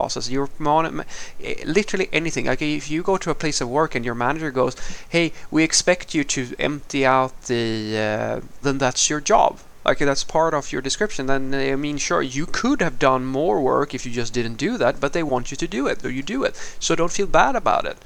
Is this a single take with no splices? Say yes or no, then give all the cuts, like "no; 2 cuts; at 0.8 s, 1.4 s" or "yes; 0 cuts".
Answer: no; 2 cuts; at 8.6 s, 16.0 s